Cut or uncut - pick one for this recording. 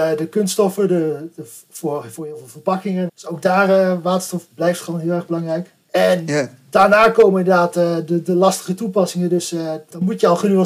cut